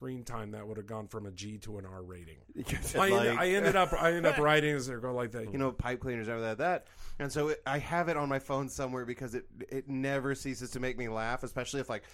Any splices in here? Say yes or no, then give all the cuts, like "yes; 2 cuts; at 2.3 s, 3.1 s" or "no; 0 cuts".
yes; 2 cuts; at 2.9 s, 5.4 s